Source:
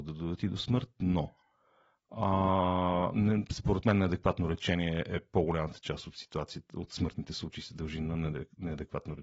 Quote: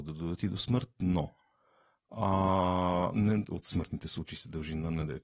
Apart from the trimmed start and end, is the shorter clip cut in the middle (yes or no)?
yes